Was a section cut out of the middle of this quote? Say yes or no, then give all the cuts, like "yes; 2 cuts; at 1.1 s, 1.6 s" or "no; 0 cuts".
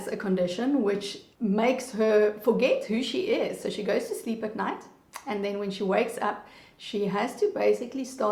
yes; 1 cut; at 1.3 s